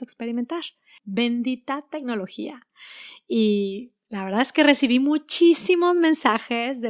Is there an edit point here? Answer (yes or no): yes